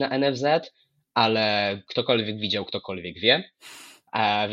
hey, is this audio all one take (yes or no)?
yes